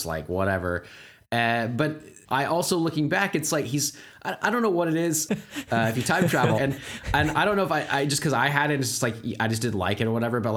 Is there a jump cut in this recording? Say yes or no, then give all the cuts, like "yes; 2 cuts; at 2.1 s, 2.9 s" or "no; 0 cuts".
yes; 3 cuts; at 2.2 s, 5.3 s, 6.6 s